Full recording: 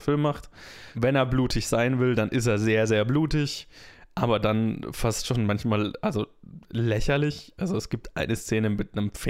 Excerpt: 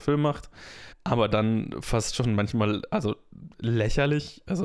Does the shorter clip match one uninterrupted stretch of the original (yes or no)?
no